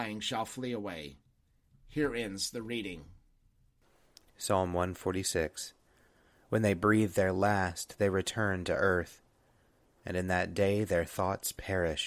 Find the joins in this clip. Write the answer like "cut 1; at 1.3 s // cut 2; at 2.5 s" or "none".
none